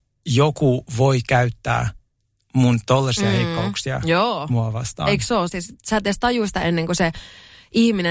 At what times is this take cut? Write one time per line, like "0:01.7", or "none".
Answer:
0:05.5